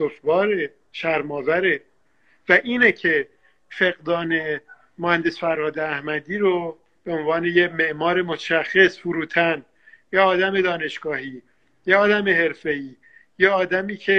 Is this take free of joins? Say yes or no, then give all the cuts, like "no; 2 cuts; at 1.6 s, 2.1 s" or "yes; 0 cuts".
yes; 0 cuts